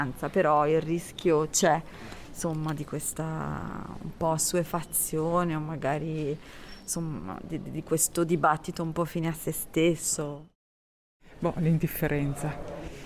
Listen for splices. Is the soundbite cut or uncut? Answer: uncut